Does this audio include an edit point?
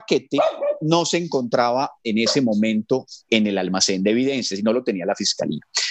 yes; 1 cut; at 3.3 s

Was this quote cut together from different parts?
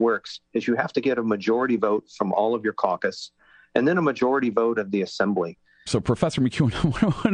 yes; 1 cut; at 5.9 s

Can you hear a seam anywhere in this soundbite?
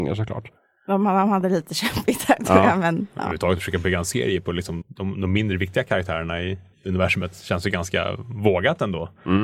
yes; 2 cuts; at 4.8 s, 6.7 s

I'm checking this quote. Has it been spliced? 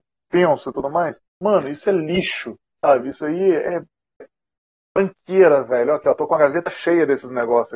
yes; 2 cuts; at 1.3 s, 4.2 s

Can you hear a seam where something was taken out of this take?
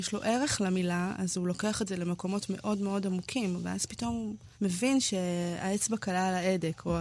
yes; 1 cut; at 4.5 s

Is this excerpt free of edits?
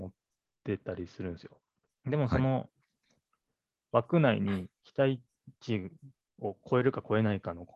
no; 2 cuts; at 2.0 s, 4.8 s

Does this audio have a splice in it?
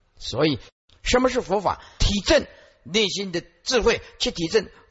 yes; 1 cut; at 2.0 s

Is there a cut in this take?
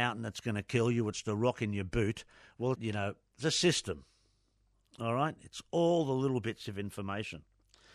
yes; 1 cut; at 2.7 s

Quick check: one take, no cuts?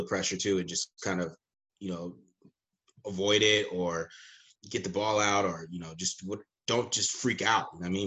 no; 1 cut; at 4.6 s

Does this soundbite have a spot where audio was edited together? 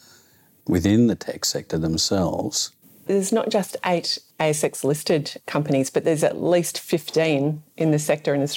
yes; 1 cut; at 3.1 s

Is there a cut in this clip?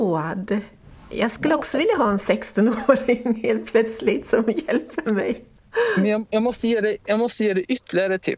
no; 0 cuts

